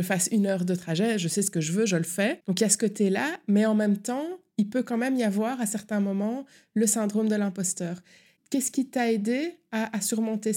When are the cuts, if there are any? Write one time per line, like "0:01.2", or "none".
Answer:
none

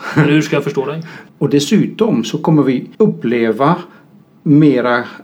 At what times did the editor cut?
0:01.3
0:02.9

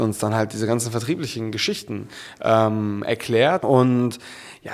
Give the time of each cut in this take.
0:03.6

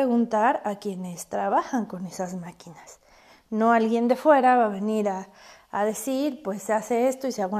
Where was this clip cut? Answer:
none

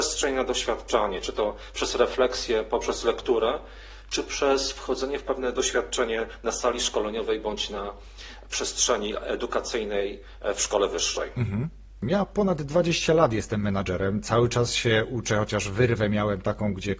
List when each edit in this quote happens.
0:12.0

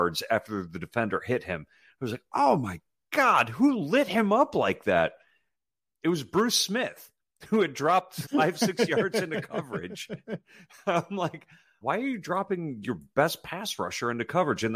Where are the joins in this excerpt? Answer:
0:08.2
0:11.8

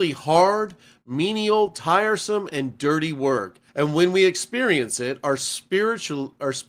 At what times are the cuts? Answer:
0:03.7

